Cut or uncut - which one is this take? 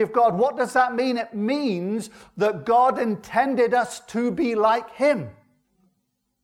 uncut